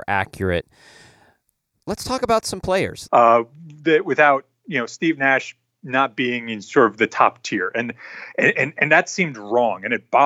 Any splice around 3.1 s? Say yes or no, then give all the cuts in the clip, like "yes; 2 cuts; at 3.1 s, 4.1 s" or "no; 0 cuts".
yes; 1 cut; at 3.1 s